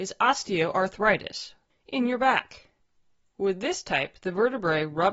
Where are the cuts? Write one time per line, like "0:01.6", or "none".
0:01.7